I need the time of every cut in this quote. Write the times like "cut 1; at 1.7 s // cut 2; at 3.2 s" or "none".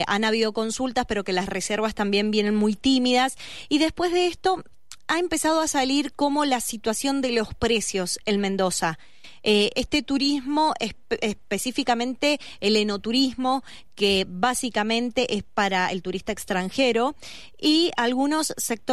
cut 1; at 9.7 s